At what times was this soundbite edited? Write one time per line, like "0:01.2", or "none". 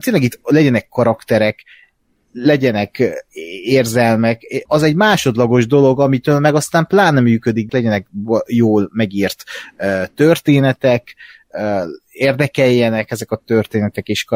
0:04.7
0:07.7